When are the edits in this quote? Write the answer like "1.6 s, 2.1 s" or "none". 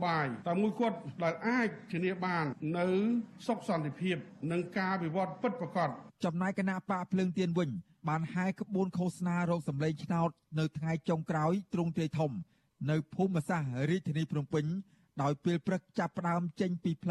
6.2 s